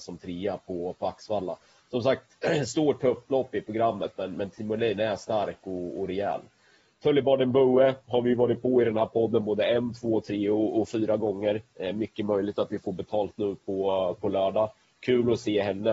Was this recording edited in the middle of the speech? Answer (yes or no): no